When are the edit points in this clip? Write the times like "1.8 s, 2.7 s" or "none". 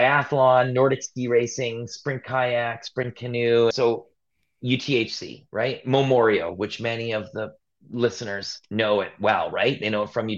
3.7 s